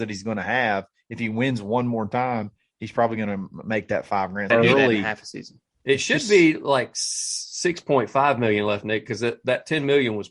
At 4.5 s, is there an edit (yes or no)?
yes